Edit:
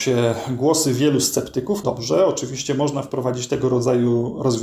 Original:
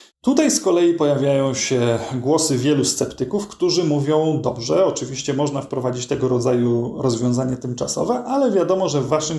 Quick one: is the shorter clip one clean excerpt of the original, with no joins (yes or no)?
no